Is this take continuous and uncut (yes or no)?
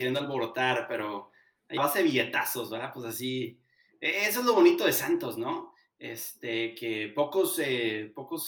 no